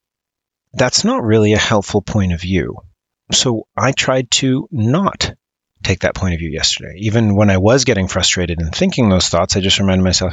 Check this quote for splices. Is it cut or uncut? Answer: uncut